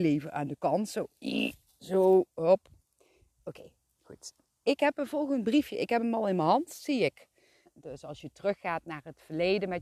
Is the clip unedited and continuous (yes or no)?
no